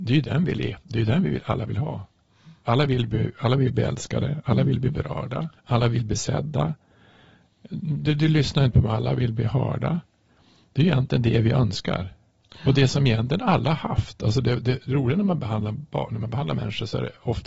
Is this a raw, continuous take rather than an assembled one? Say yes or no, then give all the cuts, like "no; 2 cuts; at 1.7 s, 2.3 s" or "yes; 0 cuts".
no; 1 cut; at 5.6 s